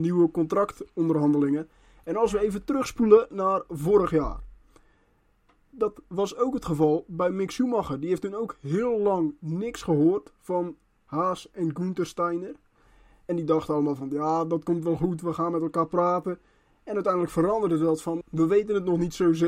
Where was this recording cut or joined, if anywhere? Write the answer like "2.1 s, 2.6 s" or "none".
18.2 s

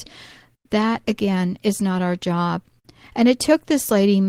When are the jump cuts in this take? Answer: none

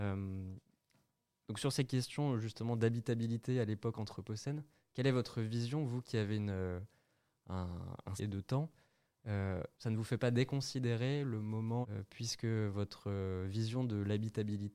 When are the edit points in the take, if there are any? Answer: 8.2 s, 9.7 s, 11.8 s

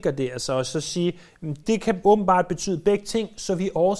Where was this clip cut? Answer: 1.6 s

